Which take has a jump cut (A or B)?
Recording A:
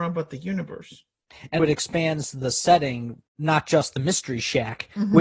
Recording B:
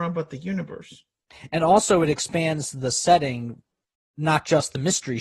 A